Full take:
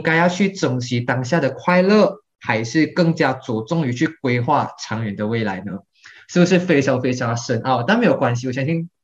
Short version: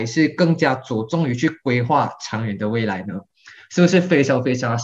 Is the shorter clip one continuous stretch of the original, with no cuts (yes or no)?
yes